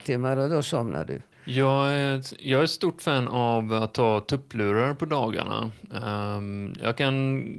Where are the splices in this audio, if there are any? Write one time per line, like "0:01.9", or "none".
0:01.3

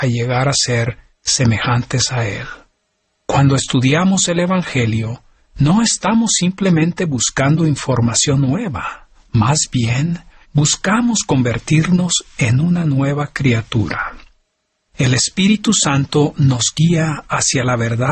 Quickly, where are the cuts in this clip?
none

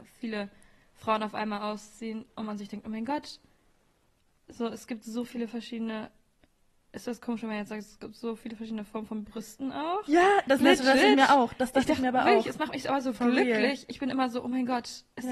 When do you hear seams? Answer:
none

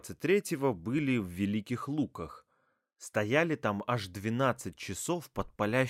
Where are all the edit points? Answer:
none

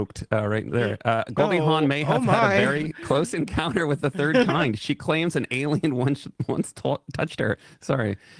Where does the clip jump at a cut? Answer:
none

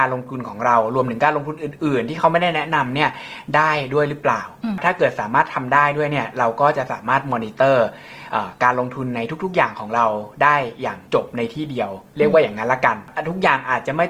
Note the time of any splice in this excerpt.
0:11.1

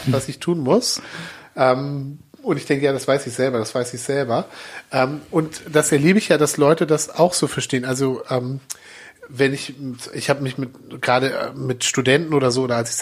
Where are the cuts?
none

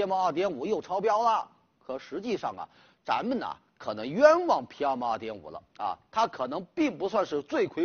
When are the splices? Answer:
none

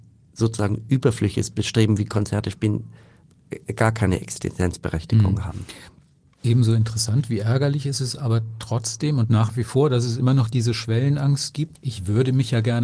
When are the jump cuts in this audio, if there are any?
0:11.7

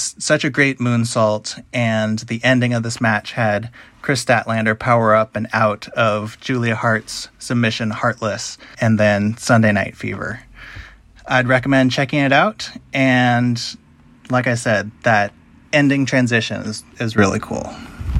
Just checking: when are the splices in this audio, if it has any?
0:08.7

